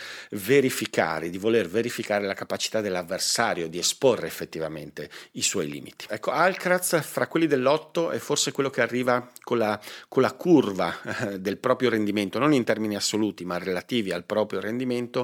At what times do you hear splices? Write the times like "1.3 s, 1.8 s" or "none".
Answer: 6.1 s